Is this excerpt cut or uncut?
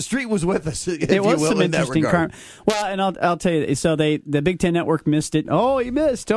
cut